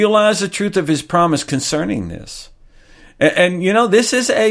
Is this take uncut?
yes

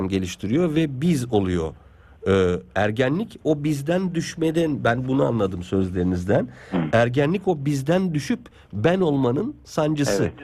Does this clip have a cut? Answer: no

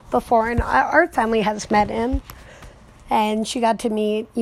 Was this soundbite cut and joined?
no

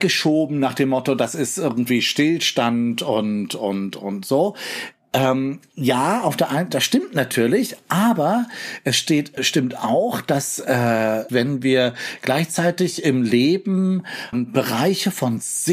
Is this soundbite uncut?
no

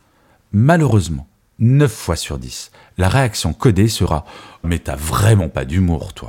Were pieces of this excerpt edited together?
yes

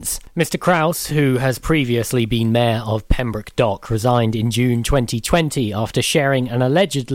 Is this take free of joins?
yes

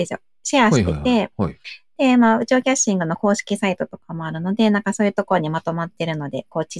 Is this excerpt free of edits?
yes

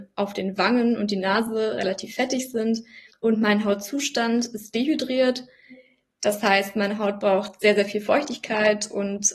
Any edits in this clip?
yes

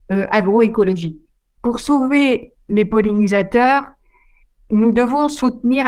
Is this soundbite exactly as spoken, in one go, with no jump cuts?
no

